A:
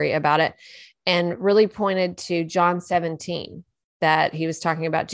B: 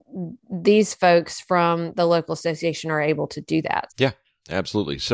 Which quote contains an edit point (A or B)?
B